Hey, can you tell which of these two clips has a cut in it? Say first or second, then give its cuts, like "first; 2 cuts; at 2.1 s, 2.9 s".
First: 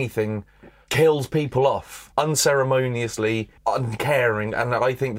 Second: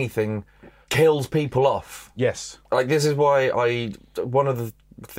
first; 2 cuts; at 2.1 s, 3.6 s